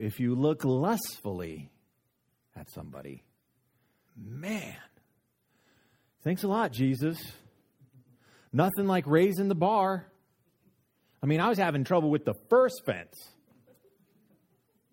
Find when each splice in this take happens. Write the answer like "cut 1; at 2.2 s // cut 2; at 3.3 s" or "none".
cut 1; at 4.1 s